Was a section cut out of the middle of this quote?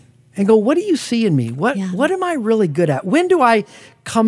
no; 0 cuts

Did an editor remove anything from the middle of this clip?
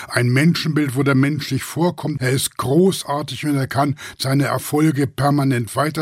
yes; 1 cut; at 2.2 s

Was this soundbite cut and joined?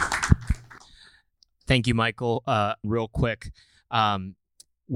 yes; 1 cut; at 2.8 s

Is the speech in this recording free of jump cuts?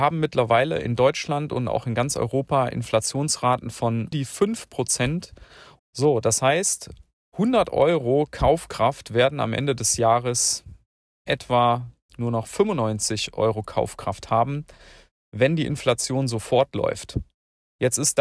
no; 2 cuts; at 4.1 s, 5.8 s

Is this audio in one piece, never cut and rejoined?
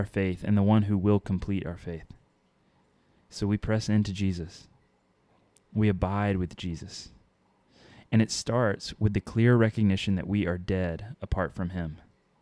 yes; 0 cuts

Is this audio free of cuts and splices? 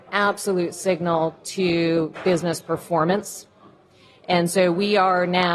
yes; 0 cuts

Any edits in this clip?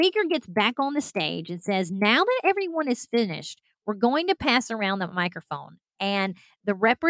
no; 0 cuts

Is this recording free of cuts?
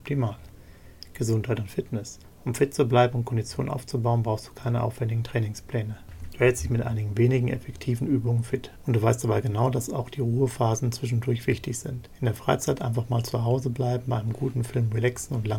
yes; 0 cuts

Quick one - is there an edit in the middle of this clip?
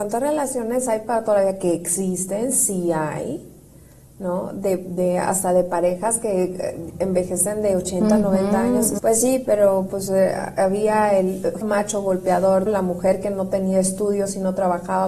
yes; 3 cuts; at 9.0 s, 11.6 s, 12.7 s

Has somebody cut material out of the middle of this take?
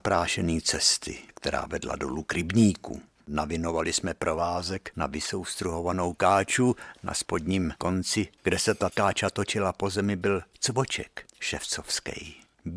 yes; 1 cut; at 3.2 s

